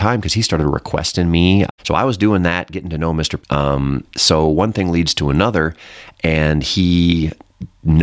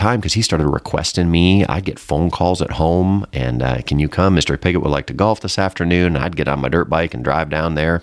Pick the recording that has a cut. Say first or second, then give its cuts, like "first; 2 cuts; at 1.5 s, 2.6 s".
first; 2 cuts; at 1.7 s, 3.4 s